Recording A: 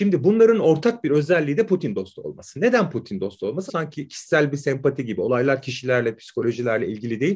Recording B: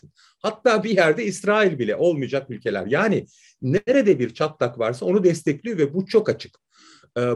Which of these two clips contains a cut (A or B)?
A